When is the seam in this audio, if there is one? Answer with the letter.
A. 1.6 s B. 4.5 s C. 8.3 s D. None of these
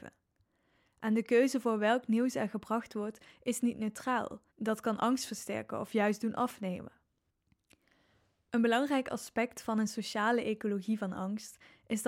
B